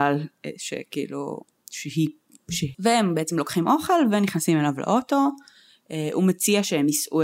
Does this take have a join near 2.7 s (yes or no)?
yes